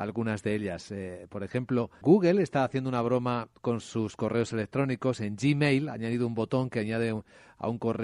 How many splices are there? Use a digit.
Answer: 1